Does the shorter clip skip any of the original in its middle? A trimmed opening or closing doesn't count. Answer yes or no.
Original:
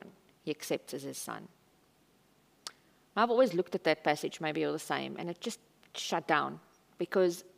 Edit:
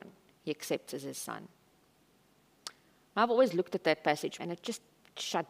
yes